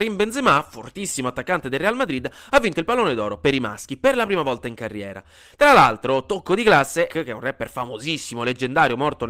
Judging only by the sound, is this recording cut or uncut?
cut